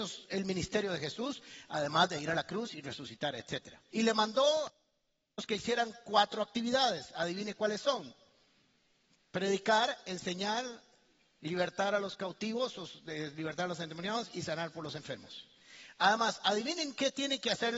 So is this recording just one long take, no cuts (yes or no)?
no